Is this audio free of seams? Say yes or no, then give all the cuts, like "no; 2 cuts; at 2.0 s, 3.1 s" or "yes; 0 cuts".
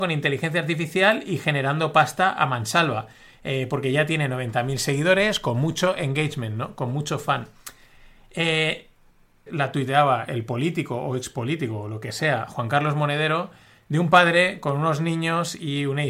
no; 1 cut; at 9.5 s